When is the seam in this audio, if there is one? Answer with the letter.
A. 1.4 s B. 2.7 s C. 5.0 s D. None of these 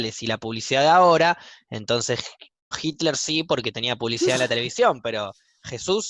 B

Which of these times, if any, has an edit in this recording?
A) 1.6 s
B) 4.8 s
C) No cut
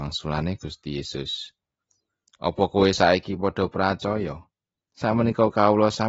B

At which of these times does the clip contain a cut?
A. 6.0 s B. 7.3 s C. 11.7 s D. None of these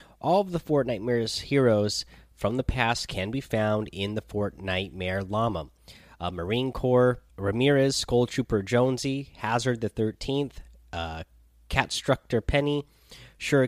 B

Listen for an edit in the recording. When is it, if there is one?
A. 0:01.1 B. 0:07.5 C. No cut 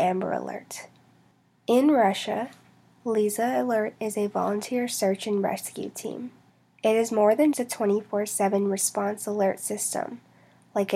B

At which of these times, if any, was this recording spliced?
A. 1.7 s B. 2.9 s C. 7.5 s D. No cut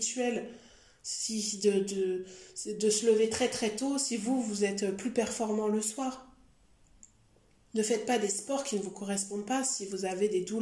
D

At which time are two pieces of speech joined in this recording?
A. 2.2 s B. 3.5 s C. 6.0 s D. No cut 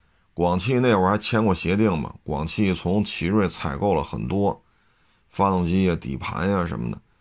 D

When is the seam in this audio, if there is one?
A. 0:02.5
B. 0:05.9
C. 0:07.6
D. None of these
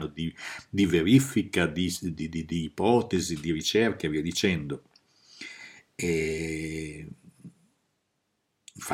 D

